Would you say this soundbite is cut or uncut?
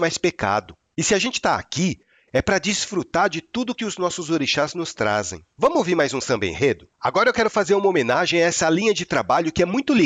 cut